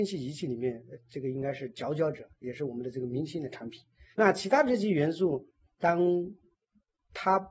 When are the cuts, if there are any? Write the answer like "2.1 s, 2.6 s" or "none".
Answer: 4.1 s